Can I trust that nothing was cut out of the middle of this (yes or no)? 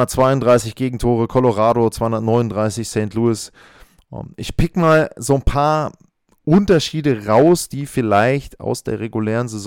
yes